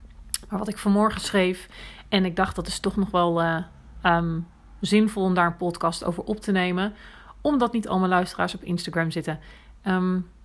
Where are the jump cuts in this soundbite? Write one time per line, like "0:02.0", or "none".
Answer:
none